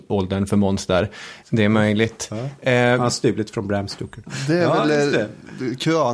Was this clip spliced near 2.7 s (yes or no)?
no